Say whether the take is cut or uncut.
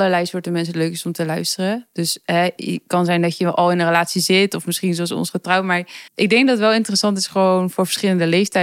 cut